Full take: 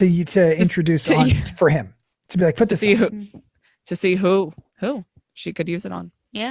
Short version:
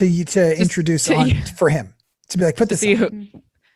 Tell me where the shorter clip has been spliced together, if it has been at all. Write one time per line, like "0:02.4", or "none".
none

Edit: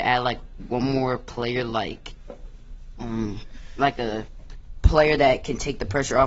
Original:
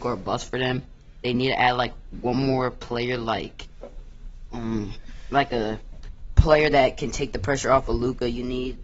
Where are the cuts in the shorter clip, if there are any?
none

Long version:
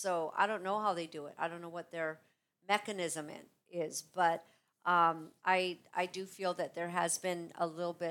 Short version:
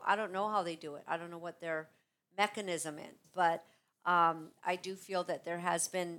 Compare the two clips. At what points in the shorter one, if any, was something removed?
0:03.2
0:04.6

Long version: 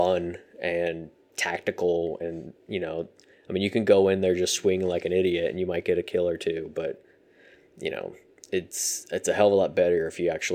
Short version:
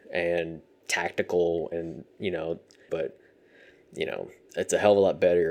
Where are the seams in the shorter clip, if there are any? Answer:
0:02.9
0:04.5

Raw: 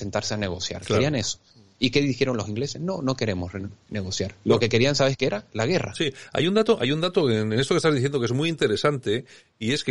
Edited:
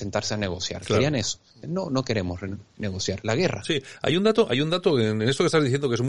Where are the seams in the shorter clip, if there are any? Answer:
0:01.6
0:03.2

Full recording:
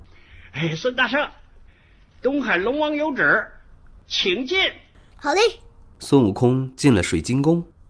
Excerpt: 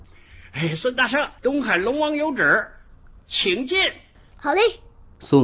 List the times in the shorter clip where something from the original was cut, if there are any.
0:01.4

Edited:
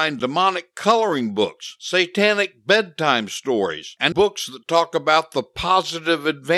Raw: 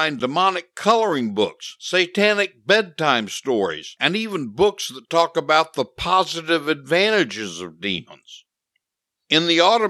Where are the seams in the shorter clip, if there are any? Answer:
0:04.1

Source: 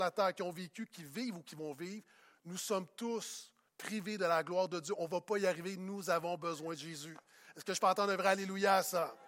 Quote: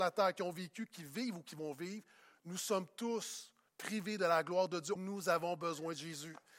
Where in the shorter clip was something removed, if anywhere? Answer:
0:05.0

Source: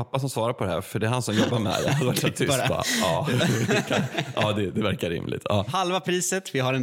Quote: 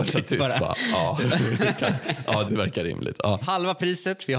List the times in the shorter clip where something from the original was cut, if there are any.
0:02.5

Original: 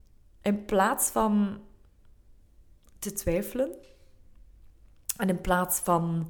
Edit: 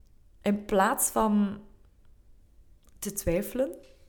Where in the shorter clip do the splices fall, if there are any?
none

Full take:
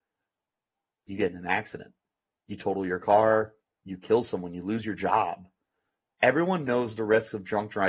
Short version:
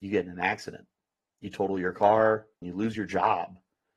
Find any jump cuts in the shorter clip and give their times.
0:02.6

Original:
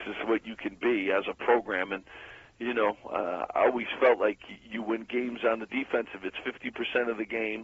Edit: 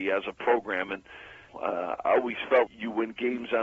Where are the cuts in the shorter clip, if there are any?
0:01.5
0:02.7

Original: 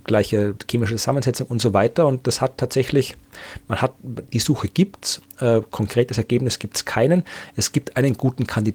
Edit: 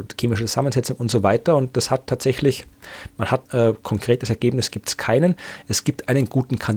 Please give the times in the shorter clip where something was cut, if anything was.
0:03.4

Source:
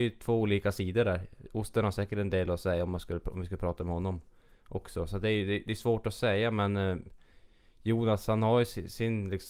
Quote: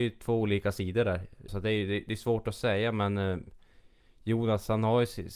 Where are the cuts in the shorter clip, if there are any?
0:01.5

